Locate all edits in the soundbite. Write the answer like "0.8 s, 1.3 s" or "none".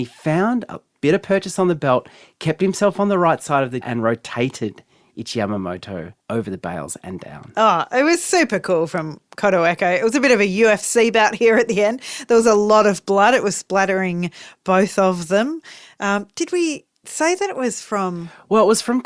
3.8 s, 6.2 s